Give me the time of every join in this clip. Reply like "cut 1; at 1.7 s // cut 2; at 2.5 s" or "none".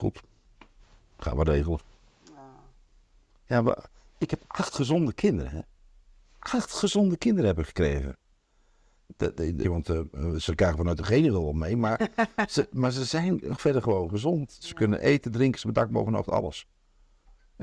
cut 1; at 9.6 s